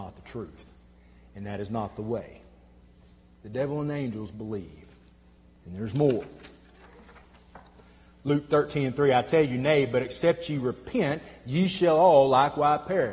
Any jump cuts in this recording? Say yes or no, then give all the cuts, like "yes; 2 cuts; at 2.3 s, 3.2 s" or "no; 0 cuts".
no; 0 cuts